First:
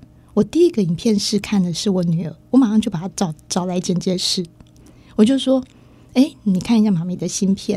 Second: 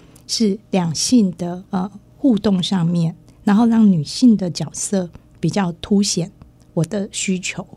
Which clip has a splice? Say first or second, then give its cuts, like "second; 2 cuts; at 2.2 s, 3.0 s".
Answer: second; 1 cut; at 1.7 s